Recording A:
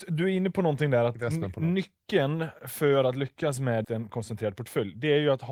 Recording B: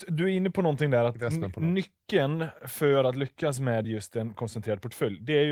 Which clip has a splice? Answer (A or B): A